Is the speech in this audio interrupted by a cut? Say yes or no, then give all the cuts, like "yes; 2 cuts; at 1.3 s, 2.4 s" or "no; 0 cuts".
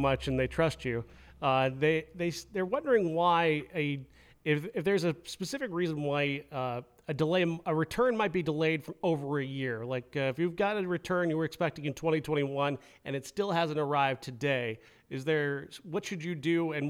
yes; 1 cut; at 7.6 s